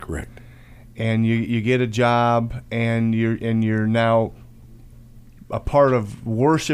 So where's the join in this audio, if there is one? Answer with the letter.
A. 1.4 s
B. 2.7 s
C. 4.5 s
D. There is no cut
D